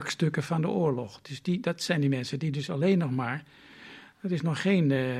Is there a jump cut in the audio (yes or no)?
no